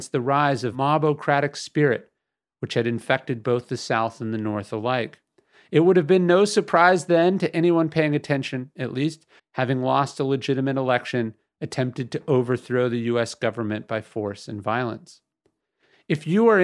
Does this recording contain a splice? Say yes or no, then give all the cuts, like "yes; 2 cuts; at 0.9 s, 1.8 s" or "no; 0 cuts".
yes; 1 cut; at 9.4 s